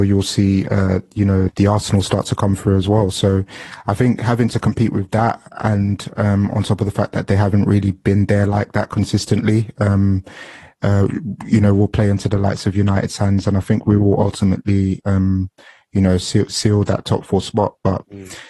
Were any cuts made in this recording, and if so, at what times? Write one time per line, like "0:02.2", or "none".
0:01.5